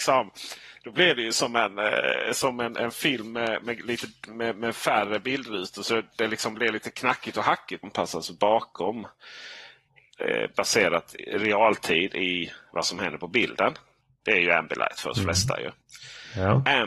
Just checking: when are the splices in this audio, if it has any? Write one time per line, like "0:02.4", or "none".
0:07.8